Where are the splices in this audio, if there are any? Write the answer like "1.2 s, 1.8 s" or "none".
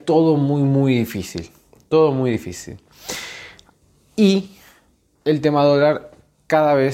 5.1 s